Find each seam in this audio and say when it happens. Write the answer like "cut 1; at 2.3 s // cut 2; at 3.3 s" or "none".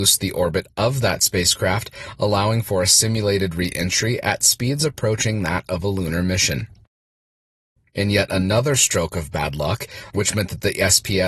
cut 1; at 7.8 s // cut 2; at 10.1 s